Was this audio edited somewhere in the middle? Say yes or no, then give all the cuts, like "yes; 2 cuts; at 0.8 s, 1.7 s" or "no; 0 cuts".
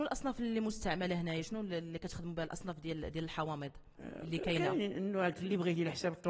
no; 0 cuts